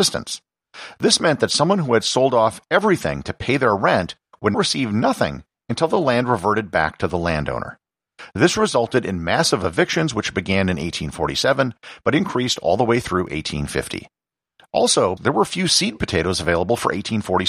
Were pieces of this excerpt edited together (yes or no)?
yes